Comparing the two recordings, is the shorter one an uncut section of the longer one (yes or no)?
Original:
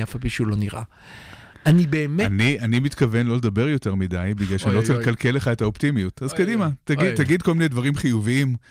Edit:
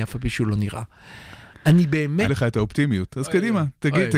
no